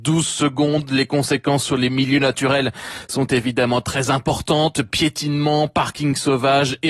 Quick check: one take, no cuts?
yes; 0 cuts

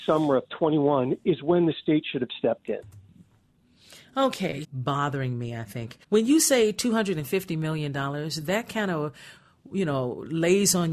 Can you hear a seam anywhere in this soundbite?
yes; 2 cuts; at 4.6 s, 6.0 s

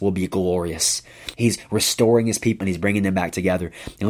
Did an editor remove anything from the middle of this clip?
yes; 2 cuts; at 1.3 s, 2.6 s

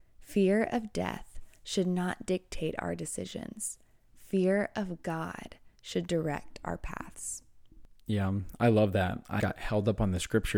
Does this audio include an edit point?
yes; 1 cut; at 9.4 s

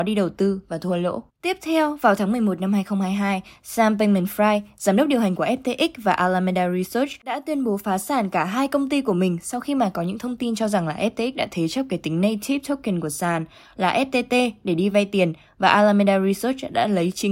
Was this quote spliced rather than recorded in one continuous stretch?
yes; 1 cut; at 1.3 s

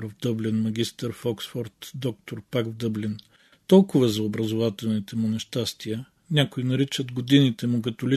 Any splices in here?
no; 0 cuts

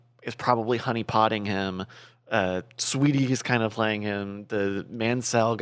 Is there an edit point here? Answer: no; 0 cuts

